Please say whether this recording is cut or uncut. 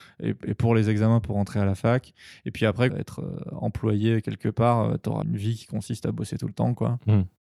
cut